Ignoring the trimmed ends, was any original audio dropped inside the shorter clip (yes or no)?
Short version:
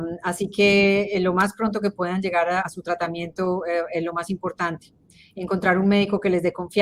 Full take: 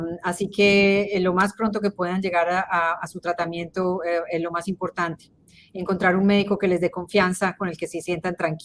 yes